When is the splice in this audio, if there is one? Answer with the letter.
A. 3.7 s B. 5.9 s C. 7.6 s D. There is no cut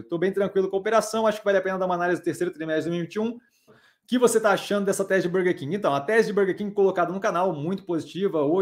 A